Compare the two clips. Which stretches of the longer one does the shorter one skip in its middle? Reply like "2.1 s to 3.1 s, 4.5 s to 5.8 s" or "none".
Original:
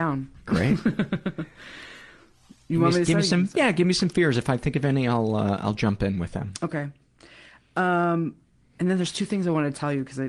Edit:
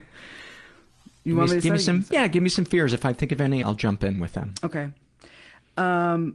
5.1 s to 5.6 s